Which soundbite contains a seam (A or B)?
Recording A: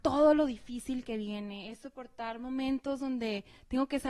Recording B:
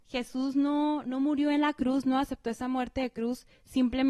B